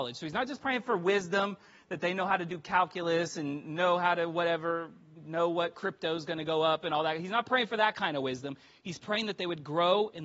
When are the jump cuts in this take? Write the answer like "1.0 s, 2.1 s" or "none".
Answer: none